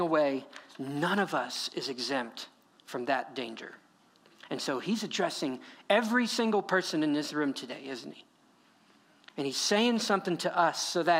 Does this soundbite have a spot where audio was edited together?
no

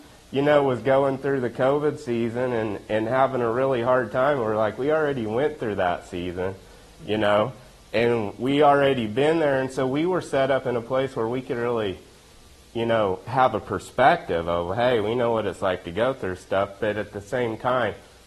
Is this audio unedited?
yes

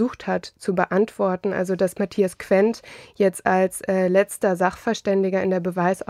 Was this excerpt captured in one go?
yes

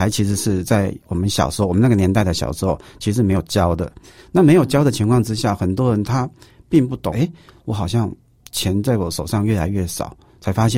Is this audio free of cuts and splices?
no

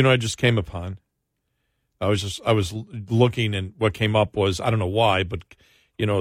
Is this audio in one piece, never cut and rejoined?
yes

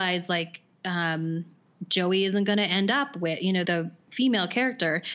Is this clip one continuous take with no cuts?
no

